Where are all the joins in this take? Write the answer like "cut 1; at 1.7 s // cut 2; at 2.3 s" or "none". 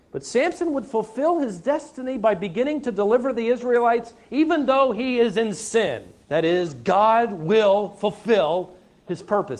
cut 1; at 6.2 s